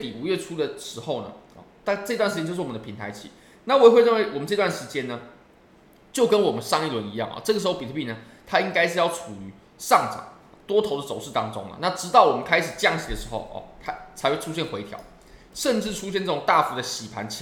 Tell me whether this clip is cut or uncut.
uncut